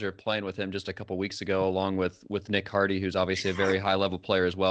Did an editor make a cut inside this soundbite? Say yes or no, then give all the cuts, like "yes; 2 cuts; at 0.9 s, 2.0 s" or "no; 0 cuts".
no; 0 cuts